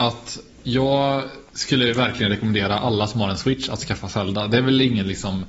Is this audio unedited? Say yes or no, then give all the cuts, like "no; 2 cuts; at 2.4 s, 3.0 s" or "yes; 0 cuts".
yes; 0 cuts